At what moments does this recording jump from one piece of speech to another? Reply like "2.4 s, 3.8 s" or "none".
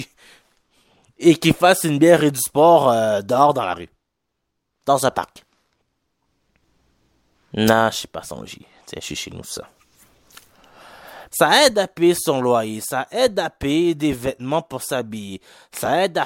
11.3 s